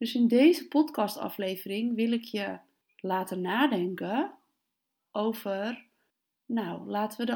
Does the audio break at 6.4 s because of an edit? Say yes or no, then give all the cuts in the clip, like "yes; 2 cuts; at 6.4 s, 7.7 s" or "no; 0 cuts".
no; 0 cuts